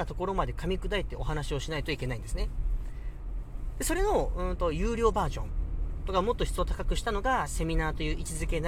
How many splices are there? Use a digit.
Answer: 0